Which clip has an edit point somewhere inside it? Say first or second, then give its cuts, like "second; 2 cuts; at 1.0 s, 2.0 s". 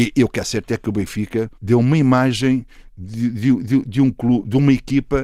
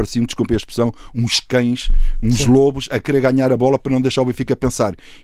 first; 1 cut; at 1.5 s